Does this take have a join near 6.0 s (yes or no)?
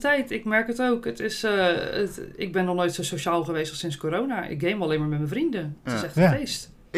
no